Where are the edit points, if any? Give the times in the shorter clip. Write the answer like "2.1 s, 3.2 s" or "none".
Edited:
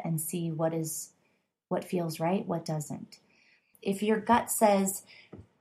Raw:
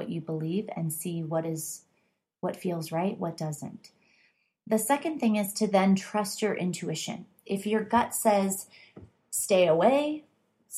3.7 s